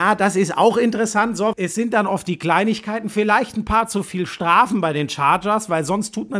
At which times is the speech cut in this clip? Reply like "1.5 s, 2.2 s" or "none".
1.5 s

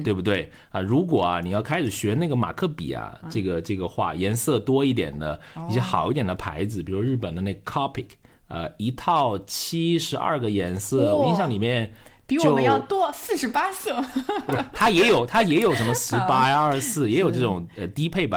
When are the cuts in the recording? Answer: none

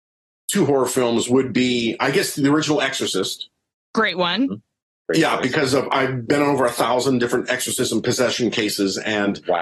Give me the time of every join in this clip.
none

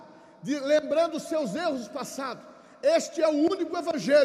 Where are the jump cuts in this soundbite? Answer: none

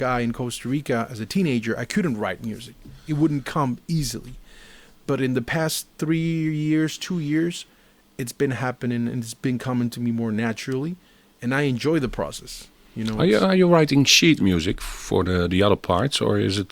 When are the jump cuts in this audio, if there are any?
none

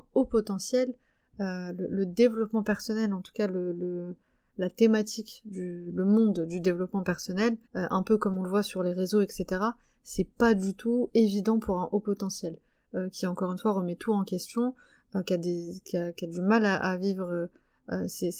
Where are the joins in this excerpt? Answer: 7.7 s, 11.1 s

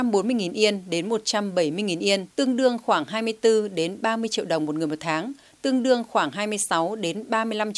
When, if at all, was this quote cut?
2.3 s, 5.5 s

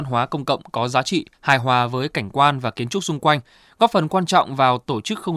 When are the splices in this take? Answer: 1.3 s

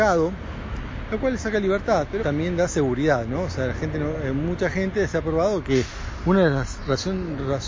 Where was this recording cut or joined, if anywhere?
2.2 s

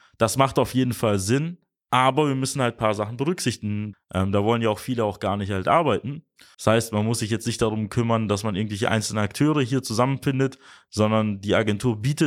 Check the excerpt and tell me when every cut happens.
3.9 s, 6.5 s

